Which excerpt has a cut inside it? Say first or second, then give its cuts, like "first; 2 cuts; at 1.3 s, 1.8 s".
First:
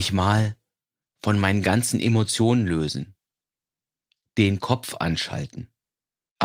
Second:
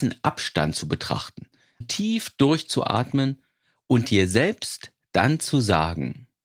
second; 1 cut; at 1.8 s